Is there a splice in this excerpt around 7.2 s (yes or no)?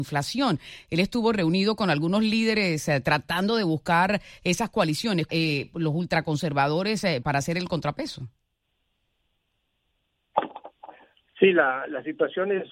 yes